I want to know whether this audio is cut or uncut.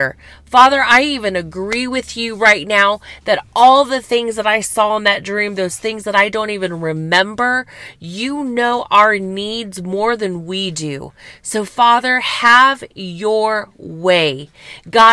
uncut